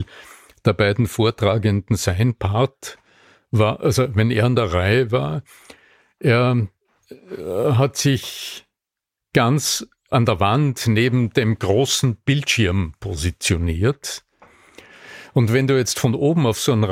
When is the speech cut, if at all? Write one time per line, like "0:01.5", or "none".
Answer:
none